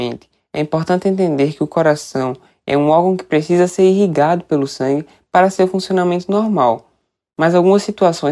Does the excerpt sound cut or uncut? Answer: uncut